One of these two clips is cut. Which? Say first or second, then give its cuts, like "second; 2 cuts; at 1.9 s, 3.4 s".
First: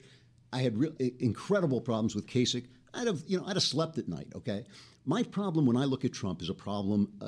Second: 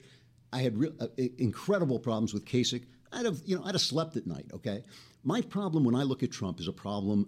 first; 1 cut; at 1.0 s